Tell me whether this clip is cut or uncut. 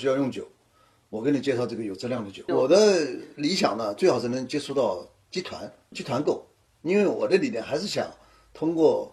cut